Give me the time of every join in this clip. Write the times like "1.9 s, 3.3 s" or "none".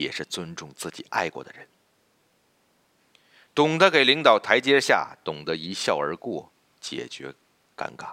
3.5 s